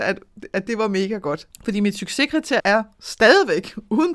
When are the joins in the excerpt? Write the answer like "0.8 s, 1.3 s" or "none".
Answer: 1.5 s, 2.6 s